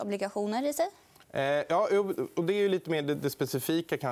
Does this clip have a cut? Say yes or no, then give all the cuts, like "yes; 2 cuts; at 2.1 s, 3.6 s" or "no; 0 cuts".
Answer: no; 0 cuts